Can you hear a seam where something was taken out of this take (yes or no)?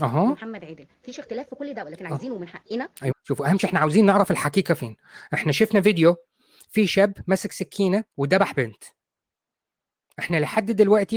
yes